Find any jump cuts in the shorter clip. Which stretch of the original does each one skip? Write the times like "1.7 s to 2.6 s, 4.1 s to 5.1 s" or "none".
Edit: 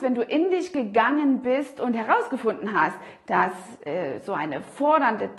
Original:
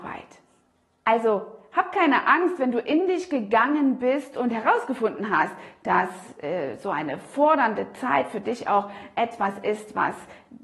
none